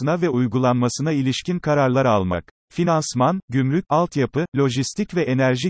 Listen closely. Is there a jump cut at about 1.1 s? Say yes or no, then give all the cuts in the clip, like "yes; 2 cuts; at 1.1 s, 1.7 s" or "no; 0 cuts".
no; 2 cuts; at 2.6 s, 3.9 s